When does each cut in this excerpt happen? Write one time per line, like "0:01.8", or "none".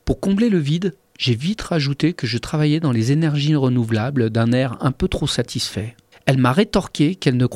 0:06.1